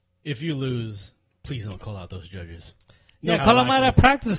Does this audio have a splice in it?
yes; 1 cut; at 3.4 s

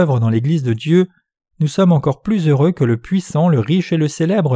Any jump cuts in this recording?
no; 0 cuts

